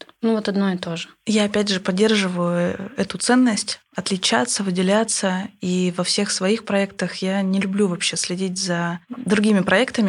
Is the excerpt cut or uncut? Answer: uncut